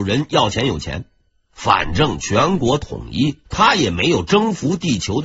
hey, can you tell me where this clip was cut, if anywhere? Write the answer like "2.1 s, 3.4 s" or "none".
1.4 s, 3.4 s